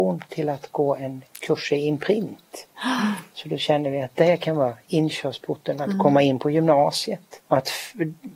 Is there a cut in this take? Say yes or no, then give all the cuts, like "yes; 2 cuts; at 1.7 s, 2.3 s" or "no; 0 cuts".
yes; 1 cut; at 7.4 s